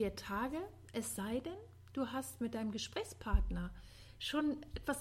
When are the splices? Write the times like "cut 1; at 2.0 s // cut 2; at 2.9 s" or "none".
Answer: none